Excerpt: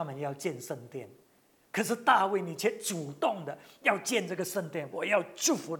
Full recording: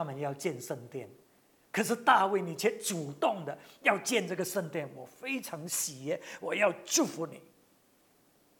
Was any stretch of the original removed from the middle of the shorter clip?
yes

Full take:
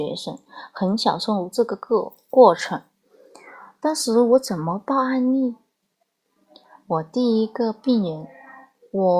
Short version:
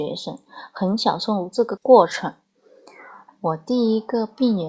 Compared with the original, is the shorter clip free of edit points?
no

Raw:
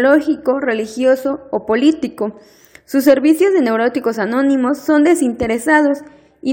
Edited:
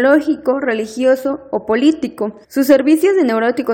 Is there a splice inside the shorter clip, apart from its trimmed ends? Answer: yes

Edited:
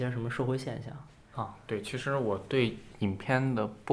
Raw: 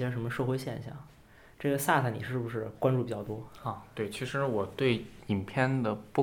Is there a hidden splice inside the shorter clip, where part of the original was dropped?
yes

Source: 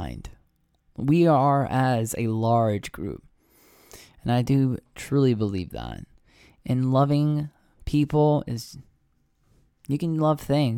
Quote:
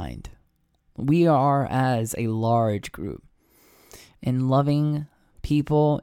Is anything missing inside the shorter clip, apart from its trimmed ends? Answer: yes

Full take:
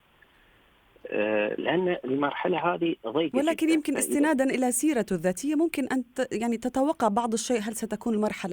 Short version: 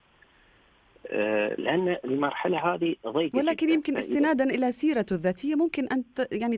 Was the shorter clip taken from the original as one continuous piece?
yes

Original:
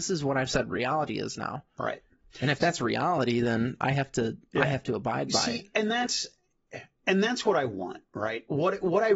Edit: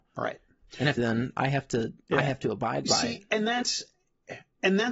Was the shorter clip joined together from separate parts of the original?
yes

